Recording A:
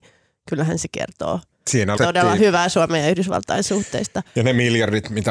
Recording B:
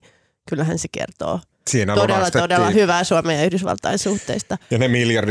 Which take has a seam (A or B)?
A